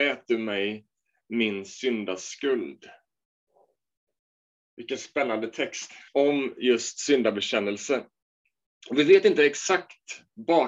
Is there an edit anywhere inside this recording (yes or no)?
yes